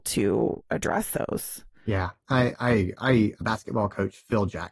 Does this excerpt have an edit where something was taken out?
yes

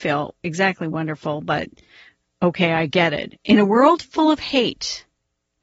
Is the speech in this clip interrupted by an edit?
yes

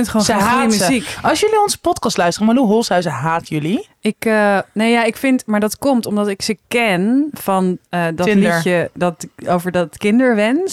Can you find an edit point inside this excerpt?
no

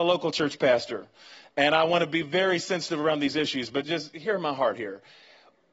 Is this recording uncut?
no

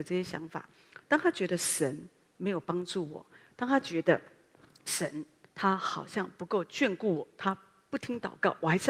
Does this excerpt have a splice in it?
yes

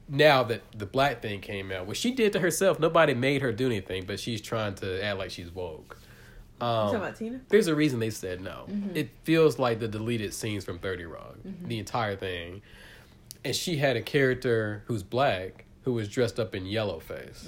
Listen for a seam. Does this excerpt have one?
yes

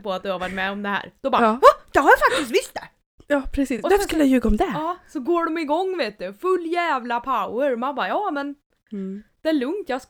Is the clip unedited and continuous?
yes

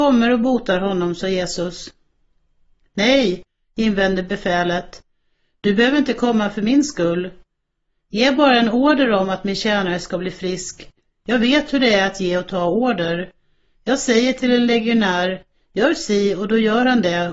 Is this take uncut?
yes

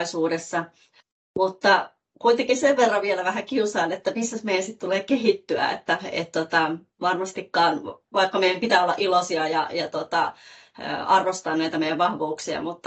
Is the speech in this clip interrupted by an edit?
no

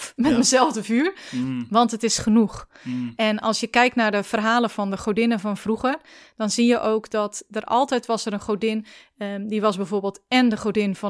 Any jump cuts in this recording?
no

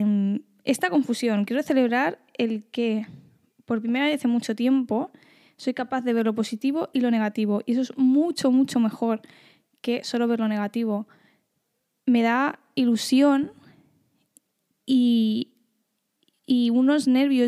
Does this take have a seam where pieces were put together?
no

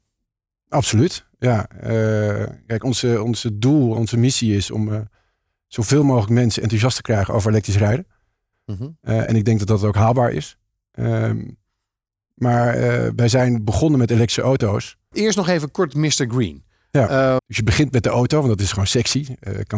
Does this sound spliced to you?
yes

